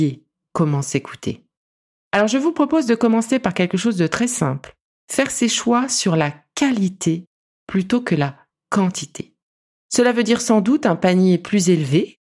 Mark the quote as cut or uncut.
uncut